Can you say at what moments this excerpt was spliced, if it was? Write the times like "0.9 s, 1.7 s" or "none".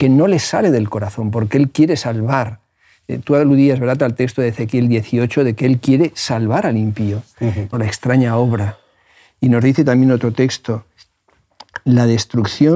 7.7 s